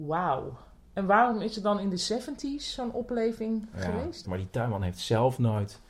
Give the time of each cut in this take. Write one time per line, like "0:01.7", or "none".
0:04.2